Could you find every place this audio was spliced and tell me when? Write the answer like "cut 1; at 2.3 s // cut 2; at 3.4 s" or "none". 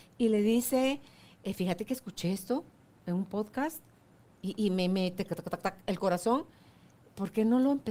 none